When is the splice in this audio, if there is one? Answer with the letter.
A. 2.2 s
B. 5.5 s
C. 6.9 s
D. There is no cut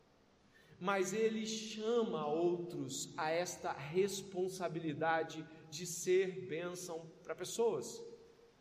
D